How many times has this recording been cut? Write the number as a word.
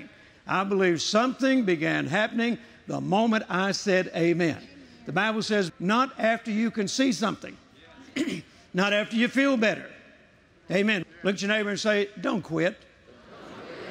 two